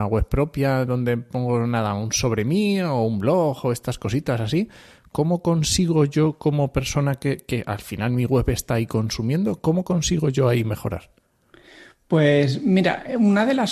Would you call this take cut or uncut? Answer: cut